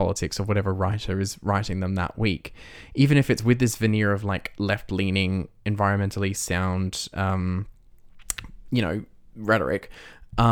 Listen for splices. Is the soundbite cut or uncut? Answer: uncut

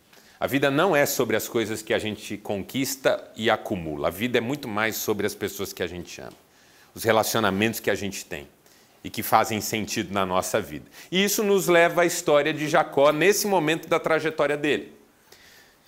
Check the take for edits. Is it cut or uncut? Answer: uncut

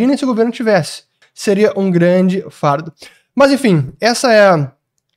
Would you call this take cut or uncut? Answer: cut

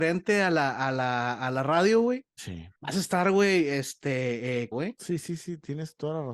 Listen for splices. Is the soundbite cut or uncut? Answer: cut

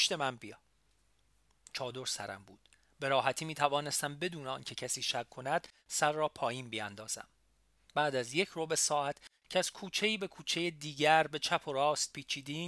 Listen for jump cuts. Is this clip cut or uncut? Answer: uncut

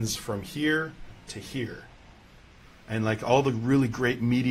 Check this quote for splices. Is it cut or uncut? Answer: uncut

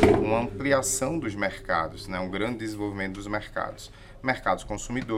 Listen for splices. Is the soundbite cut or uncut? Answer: uncut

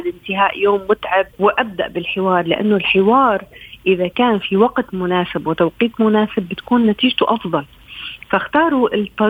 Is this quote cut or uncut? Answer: cut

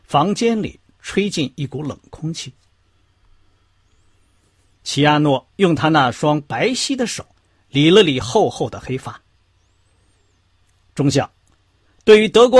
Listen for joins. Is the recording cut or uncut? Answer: uncut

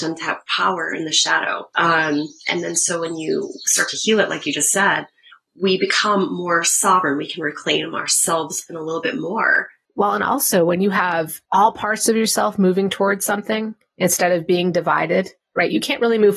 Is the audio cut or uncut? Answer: uncut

